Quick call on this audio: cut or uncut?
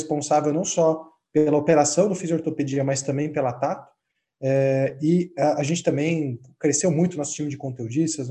uncut